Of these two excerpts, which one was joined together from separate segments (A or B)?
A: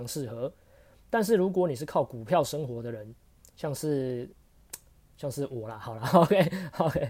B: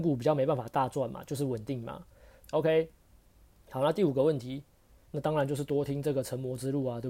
B